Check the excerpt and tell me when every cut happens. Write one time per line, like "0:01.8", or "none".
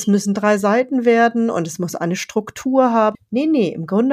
0:03.1